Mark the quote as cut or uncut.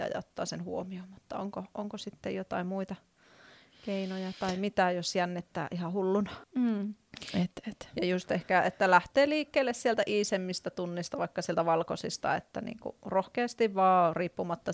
cut